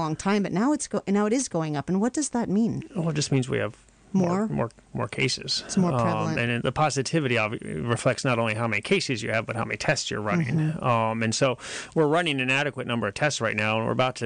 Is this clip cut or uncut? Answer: uncut